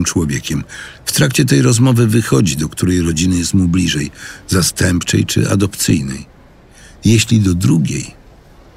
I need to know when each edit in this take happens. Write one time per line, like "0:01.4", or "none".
0:01.0